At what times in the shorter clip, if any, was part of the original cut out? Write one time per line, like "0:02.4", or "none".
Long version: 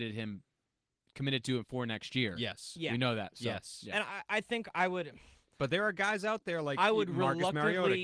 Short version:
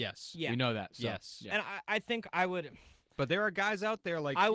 none